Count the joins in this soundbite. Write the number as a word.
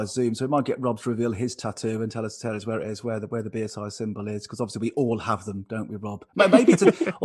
zero